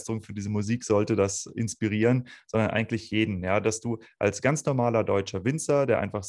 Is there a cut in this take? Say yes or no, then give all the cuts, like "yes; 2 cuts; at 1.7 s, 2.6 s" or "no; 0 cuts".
no; 0 cuts